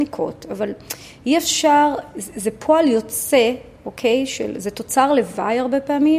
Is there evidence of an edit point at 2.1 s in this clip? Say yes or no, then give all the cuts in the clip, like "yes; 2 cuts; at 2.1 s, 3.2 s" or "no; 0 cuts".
no; 0 cuts